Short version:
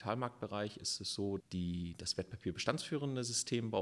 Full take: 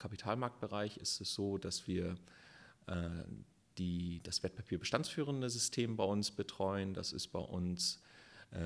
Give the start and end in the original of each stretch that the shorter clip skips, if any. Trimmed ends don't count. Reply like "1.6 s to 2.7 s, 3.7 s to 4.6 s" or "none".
1.6 s to 3.7 s